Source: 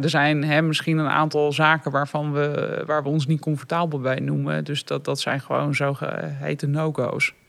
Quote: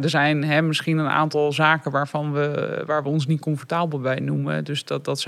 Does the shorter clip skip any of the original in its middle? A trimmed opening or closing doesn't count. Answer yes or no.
no